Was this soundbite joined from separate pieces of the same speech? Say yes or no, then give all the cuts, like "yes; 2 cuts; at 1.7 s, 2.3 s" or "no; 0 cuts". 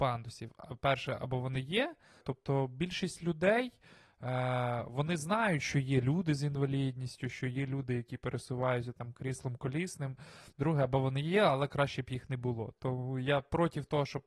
yes; 2 cuts; at 2.2 s, 10.5 s